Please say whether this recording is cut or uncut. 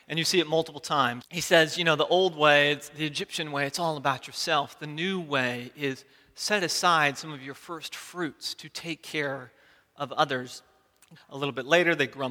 cut